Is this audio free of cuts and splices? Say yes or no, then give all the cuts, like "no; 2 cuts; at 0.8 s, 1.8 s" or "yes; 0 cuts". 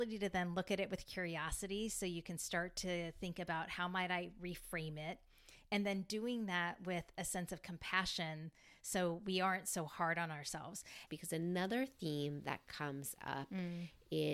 no; 1 cut; at 11.1 s